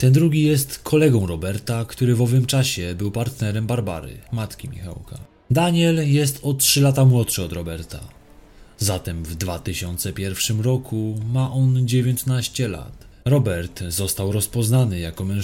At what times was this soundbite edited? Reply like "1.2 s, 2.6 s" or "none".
13.2 s